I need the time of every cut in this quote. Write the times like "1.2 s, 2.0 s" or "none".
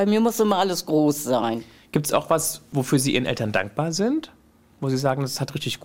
none